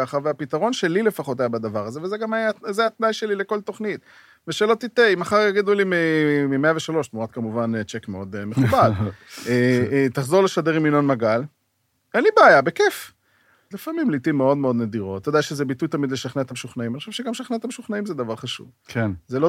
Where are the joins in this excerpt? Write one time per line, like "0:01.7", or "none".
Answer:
0:13.7
0:15.2